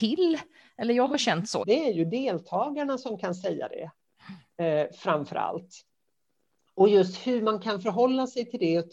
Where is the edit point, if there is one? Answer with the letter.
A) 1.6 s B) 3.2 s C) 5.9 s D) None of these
A